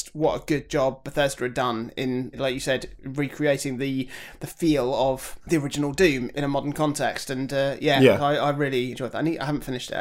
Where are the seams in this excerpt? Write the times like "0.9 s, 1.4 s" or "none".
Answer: 8.9 s